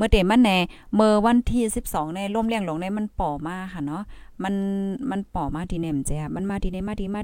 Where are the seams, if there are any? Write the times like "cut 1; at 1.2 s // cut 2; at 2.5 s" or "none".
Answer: none